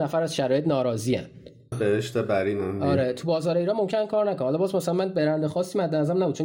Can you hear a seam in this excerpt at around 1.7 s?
yes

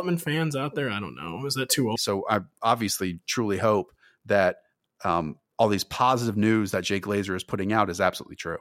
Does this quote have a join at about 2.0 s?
yes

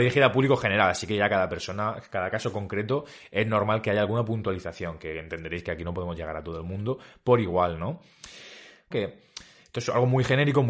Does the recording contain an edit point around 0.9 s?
no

